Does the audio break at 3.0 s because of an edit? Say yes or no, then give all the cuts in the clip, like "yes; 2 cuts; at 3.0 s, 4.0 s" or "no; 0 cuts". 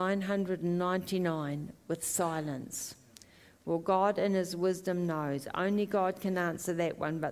no; 0 cuts